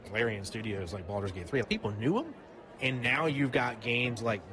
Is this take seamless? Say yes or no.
no